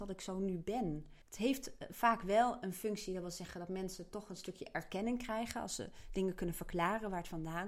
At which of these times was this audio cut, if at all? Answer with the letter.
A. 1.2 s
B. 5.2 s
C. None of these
A